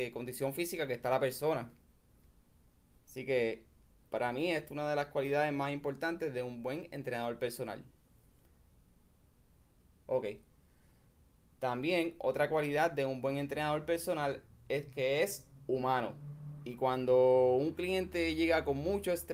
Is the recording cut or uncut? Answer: uncut